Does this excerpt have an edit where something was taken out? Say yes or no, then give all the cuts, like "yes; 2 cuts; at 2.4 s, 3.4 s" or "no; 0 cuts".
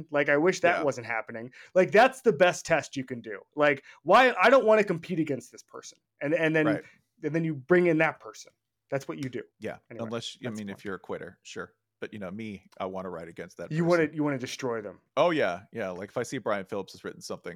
yes; 1 cut; at 9.5 s